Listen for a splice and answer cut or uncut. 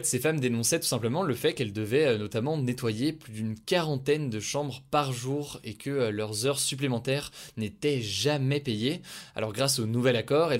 uncut